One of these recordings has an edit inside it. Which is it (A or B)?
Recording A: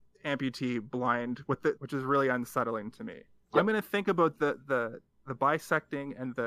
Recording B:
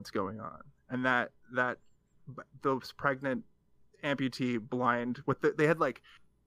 A